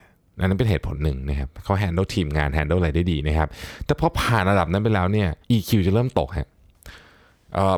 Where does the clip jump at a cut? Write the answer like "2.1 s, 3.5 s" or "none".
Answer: 5.4 s

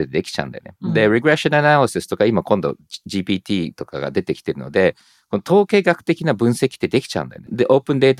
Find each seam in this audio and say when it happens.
none

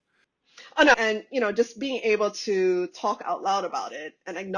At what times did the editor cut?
0.9 s

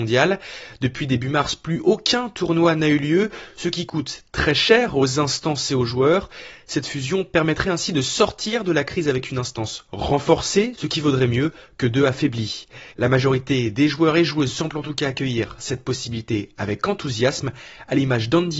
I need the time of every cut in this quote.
10.7 s, 12.9 s

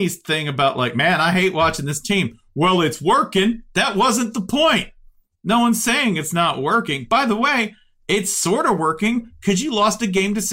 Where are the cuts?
none

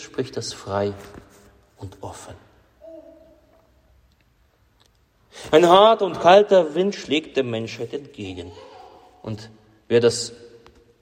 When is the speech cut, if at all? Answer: 5.5 s

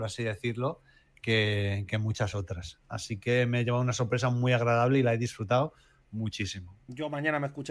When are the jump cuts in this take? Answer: 1.9 s

